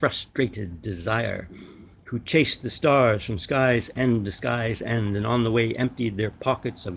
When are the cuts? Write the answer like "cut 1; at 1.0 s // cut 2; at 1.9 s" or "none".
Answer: none